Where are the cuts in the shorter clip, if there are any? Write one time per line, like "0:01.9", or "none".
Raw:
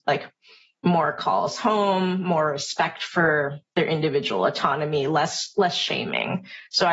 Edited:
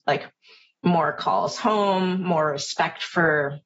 none